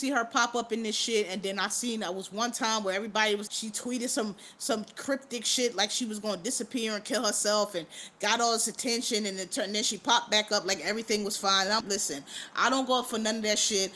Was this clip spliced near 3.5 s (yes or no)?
yes